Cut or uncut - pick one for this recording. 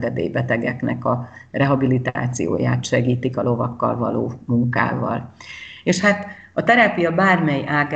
uncut